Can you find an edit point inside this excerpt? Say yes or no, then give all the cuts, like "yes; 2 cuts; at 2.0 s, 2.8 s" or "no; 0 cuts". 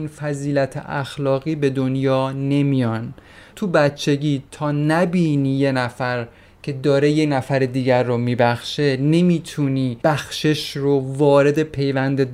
yes; 2 cuts; at 3.5 s, 10.0 s